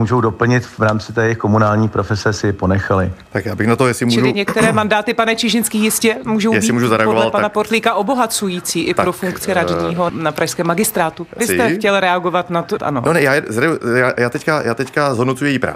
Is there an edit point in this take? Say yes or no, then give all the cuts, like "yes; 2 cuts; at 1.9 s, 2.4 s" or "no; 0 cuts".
yes; 3 cuts; at 10.1 s, 11.4 s, 12.8 s